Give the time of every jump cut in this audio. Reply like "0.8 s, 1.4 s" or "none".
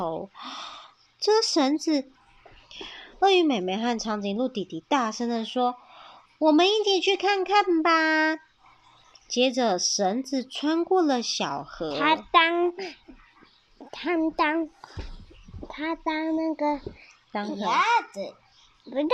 2.1 s